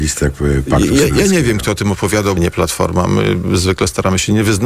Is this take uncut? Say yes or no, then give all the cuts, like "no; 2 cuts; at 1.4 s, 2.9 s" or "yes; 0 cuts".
no; 1 cut; at 2.4 s